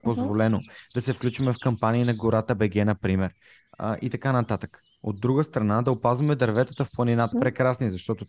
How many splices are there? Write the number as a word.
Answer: one